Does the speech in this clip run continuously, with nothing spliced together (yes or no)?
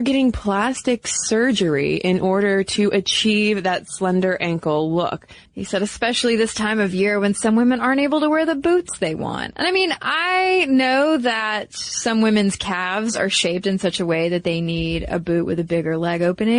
no